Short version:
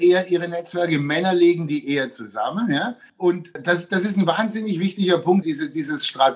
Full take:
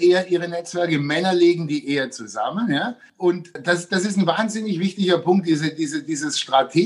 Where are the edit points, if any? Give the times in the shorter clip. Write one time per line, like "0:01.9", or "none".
0:05.4